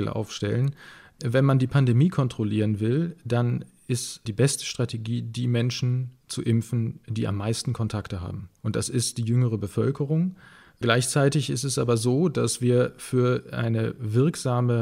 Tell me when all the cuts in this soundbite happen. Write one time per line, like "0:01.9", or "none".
0:08.6